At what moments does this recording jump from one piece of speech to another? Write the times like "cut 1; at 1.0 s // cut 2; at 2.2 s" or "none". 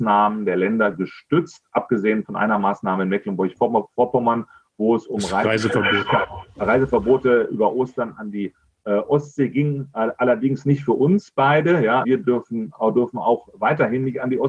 cut 1; at 12.0 s